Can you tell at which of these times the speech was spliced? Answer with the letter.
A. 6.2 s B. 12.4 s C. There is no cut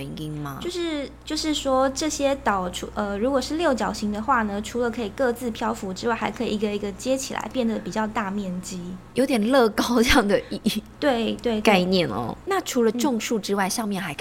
B